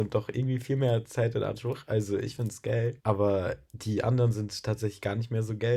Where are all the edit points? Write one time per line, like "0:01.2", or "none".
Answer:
0:03.0